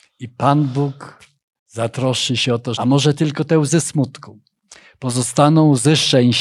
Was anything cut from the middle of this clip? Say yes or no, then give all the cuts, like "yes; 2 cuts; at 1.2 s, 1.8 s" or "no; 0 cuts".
yes; 1 cut; at 2.7 s